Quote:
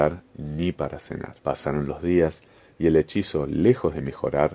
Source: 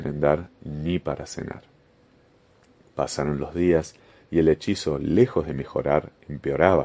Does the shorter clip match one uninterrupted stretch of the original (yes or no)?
no